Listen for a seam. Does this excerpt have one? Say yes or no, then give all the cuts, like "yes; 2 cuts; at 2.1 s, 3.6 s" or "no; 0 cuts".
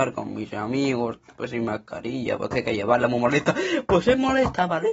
no; 0 cuts